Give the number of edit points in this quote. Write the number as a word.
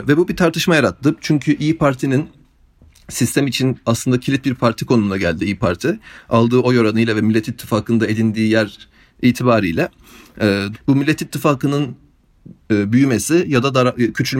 one